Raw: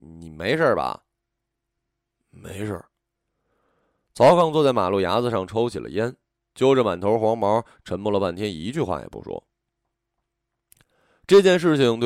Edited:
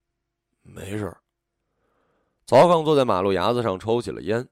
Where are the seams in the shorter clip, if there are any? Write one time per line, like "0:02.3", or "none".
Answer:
none